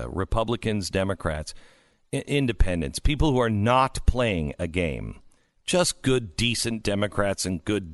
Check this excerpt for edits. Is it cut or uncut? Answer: uncut